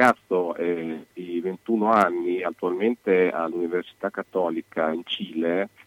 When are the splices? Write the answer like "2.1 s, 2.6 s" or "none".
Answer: none

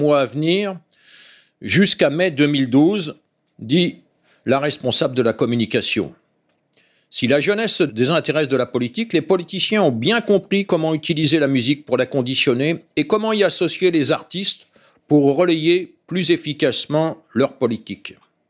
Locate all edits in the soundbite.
none

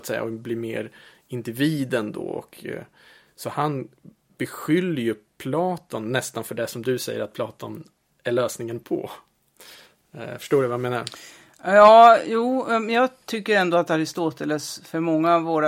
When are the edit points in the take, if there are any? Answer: none

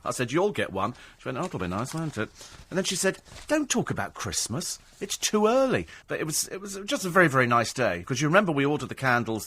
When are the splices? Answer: 6.0 s, 8.1 s

